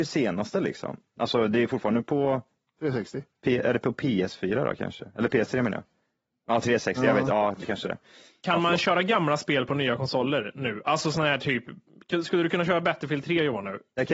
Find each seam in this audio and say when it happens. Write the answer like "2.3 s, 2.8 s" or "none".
none